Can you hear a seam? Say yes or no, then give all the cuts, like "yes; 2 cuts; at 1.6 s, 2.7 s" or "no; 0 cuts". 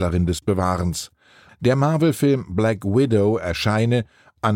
yes; 1 cut; at 1.5 s